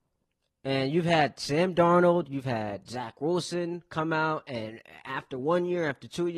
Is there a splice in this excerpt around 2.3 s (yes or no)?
no